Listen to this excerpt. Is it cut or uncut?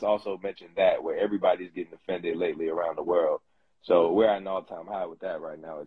uncut